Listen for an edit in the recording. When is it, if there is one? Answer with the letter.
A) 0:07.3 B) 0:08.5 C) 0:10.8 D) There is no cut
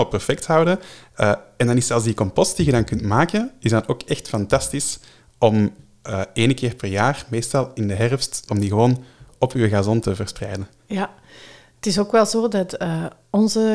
B